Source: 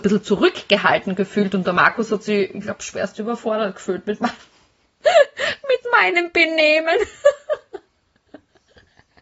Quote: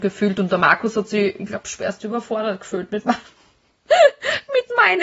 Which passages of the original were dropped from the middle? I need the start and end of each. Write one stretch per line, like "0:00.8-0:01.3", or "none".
none

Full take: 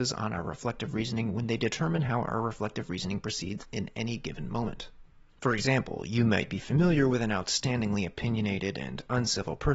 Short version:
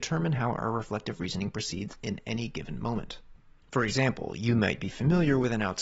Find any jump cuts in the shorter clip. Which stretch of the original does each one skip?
none

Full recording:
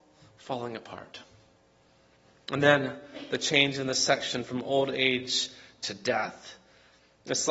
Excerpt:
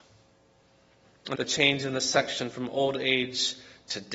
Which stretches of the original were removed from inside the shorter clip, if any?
0:02.6-0:03.3

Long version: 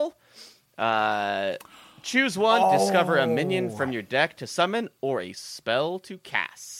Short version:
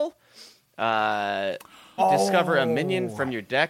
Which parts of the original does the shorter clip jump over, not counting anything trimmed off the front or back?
0:02.0-0:02.6

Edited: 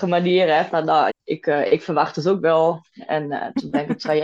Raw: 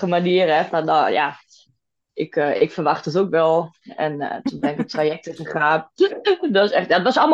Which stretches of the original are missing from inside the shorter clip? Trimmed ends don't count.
0:01.1-0:02.0

